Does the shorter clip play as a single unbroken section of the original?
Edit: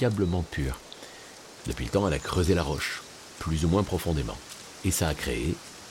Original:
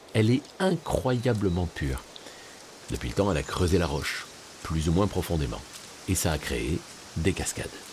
yes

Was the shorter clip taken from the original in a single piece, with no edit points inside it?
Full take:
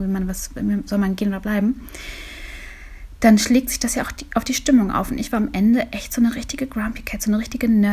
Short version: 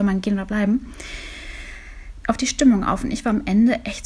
no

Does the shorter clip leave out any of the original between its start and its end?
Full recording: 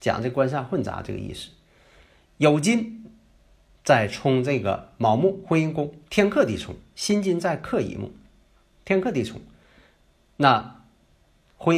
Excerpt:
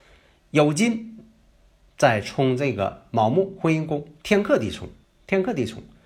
yes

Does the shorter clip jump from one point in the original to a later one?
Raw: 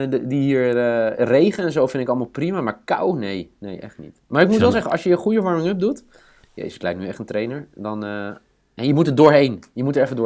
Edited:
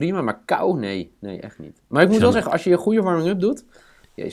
no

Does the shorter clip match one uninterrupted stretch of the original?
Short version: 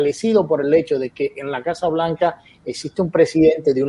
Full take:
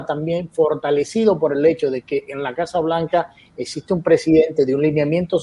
yes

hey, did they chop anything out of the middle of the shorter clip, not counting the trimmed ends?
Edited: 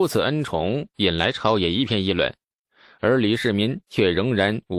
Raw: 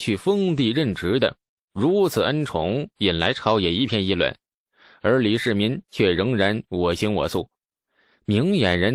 no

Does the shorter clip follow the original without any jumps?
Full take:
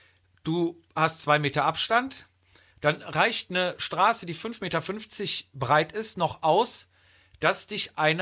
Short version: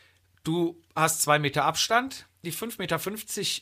no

